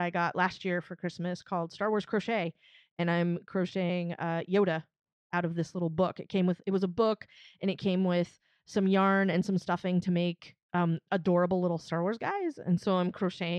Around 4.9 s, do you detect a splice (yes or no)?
no